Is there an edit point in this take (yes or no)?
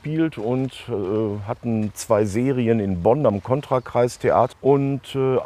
yes